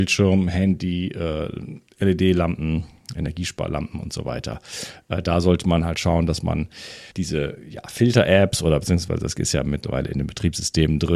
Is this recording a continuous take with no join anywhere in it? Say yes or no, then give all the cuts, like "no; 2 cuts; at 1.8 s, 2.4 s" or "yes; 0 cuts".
no; 1 cut; at 7.1 s